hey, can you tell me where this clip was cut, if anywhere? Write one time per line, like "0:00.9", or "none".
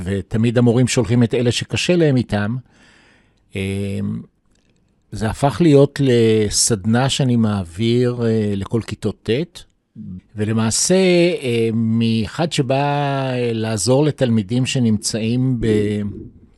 0:10.2